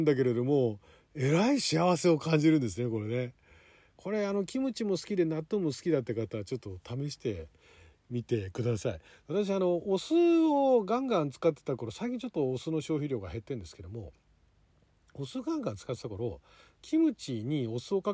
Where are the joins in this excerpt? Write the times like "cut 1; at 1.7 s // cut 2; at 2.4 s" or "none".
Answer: none